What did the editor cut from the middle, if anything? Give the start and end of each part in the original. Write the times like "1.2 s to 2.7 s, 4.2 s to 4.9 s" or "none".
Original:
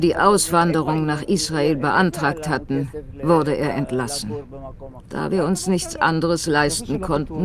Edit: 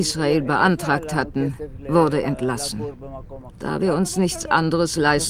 3.6 s to 3.7 s